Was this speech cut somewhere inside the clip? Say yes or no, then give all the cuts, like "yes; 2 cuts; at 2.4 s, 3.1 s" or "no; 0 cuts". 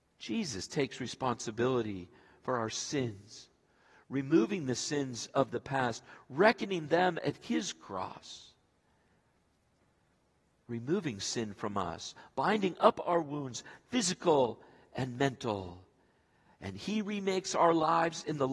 no; 0 cuts